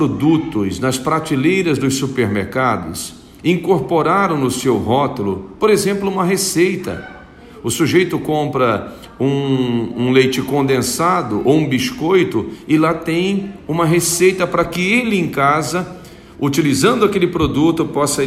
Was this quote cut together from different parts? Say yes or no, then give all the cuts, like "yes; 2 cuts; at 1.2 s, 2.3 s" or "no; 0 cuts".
no; 0 cuts